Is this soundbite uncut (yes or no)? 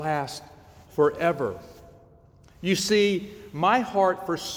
yes